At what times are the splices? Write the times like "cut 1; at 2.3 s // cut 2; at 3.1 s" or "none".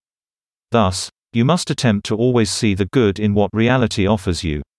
cut 1; at 1.2 s